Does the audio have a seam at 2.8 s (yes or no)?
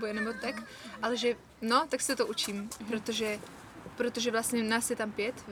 yes